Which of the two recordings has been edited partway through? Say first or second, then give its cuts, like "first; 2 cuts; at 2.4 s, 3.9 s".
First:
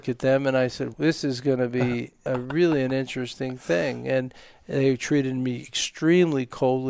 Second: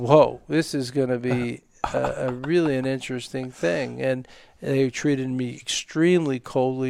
first; 2 cuts; at 0.9 s, 2.3 s